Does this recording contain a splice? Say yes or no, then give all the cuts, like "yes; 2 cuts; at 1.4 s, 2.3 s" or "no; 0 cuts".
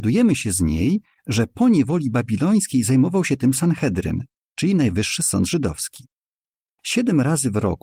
no; 0 cuts